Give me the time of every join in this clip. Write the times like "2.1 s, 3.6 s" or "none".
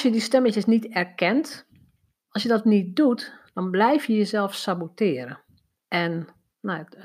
2.2 s